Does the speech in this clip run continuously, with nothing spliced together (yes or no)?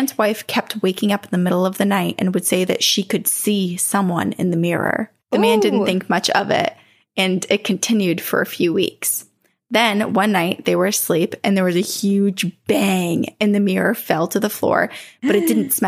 yes